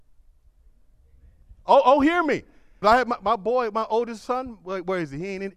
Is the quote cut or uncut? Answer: cut